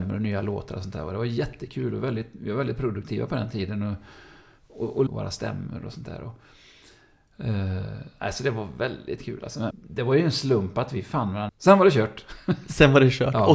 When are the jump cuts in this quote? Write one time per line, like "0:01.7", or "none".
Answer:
0:05.1
0:09.7
0:11.5